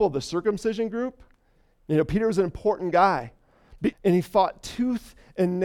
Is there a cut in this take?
yes; 2 cuts; at 1.7 s, 3.9 s

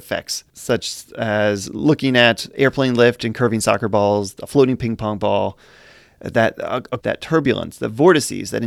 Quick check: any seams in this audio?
yes; 1 cut; at 7.0 s

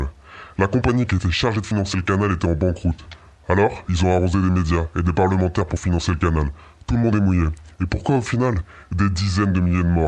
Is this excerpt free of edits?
yes; 0 cuts

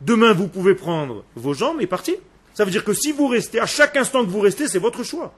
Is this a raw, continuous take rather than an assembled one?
no; 1 cut; at 2.4 s

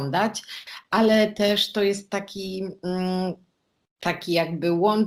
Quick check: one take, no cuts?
yes; 0 cuts

